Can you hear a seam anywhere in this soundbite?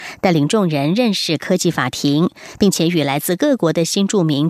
no; 0 cuts

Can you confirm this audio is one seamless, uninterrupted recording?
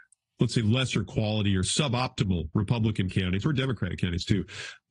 yes; 0 cuts

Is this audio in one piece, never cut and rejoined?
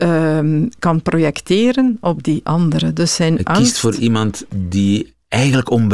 yes; 0 cuts

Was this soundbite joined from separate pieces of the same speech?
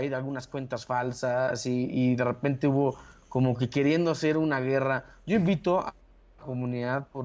no; 0 cuts

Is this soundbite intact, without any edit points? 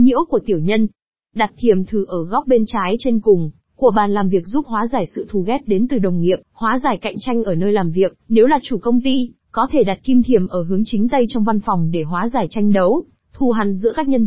no; 1 cut; at 6.4 s

